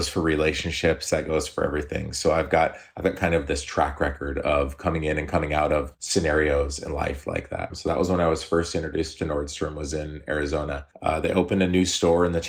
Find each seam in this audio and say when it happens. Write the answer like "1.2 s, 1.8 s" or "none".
7.7 s